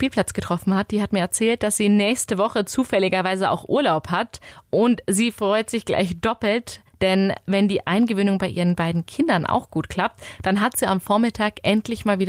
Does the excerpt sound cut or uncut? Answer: uncut